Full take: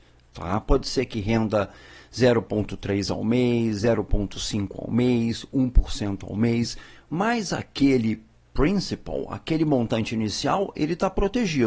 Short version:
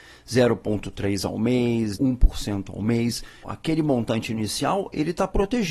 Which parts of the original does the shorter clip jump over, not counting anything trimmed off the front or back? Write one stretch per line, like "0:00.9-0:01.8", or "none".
0:03.8-0:05.5
0:07.0-0:09.3